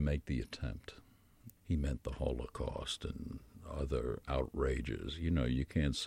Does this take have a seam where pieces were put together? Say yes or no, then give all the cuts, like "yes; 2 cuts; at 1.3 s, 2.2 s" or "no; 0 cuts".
yes; 1 cut; at 1.6 s